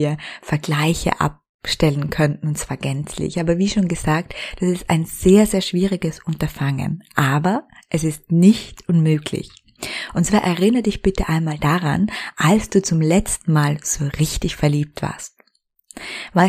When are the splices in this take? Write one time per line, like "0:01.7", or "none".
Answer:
none